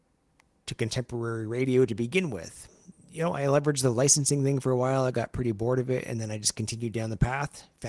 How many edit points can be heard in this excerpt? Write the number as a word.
one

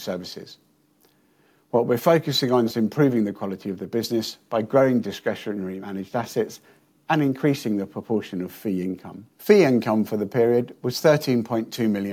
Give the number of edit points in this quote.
two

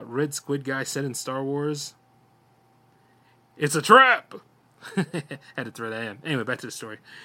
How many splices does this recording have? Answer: zero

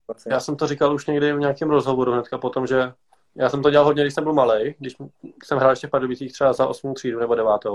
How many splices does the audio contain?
zero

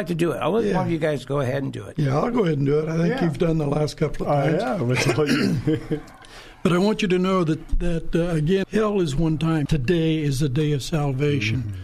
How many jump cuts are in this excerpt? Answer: two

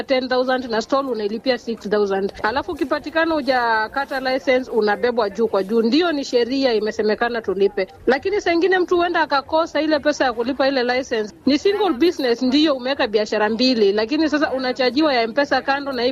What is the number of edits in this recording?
one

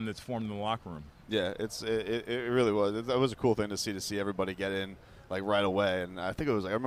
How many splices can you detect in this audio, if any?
zero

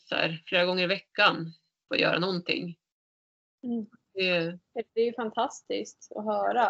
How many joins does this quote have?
two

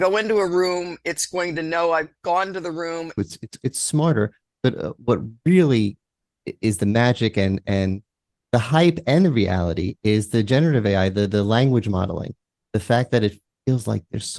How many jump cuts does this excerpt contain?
one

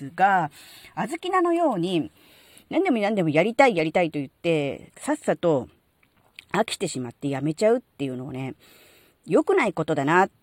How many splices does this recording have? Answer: one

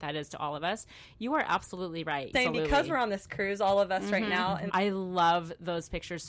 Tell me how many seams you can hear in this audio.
two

